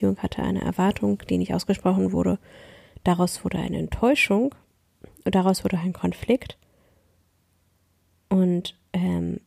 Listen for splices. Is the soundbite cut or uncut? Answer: uncut